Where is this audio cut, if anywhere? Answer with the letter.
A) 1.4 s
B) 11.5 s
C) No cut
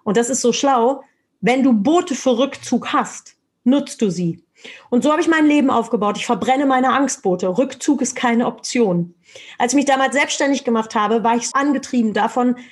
B